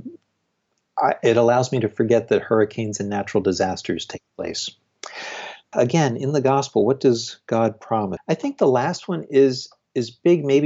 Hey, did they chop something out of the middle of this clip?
yes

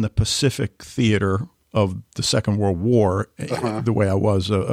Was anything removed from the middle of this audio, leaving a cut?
no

